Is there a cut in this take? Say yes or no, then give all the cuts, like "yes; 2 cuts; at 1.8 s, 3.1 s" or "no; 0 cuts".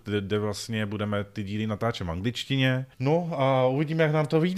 yes; 1 cut; at 2.9 s